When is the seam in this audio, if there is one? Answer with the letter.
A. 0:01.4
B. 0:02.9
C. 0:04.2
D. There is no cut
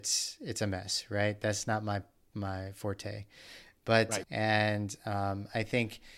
C